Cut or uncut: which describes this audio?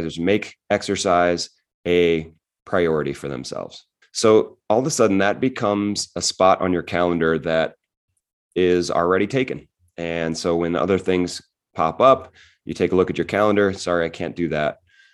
cut